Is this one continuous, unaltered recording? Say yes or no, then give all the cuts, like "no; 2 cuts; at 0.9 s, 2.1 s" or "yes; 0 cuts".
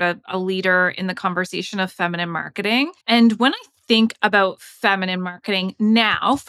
no; 1 cut; at 3.0 s